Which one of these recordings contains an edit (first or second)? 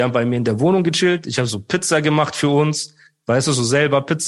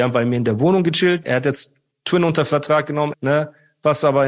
second